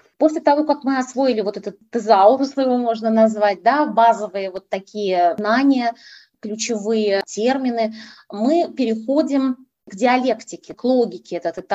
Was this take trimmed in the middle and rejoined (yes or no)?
no